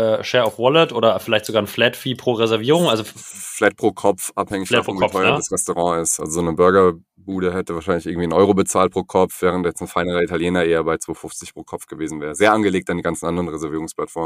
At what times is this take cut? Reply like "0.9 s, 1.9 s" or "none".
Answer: none